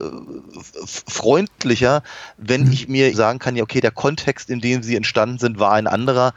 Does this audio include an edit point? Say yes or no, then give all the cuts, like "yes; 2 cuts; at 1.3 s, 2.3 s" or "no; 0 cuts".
yes; 1 cut; at 3.1 s